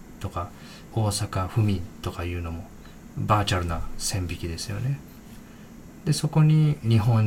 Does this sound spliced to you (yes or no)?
yes